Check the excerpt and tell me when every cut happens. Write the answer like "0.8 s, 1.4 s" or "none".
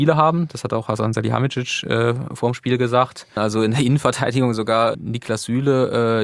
3.4 s, 4.9 s

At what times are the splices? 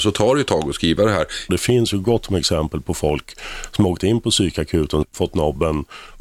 1.5 s, 5.0 s

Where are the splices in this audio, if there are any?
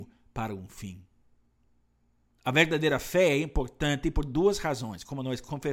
2.3 s

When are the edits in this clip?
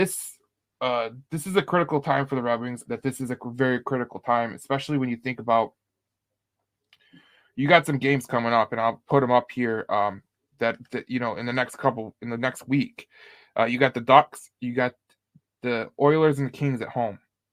2.9 s

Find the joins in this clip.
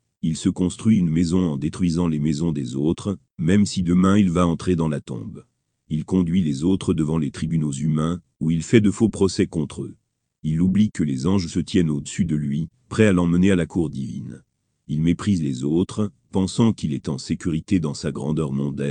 none

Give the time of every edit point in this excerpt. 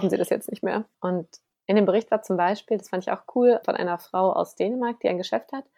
0.9 s, 3.6 s

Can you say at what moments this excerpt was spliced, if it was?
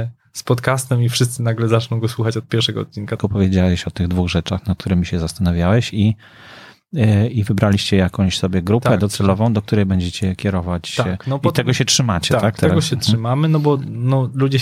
3.2 s

